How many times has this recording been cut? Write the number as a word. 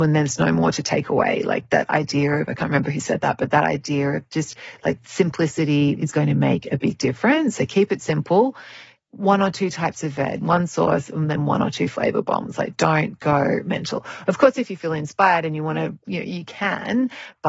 one